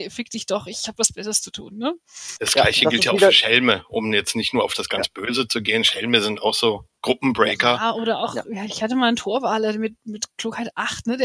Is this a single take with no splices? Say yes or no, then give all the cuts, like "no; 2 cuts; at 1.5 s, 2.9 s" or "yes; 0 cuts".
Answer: yes; 0 cuts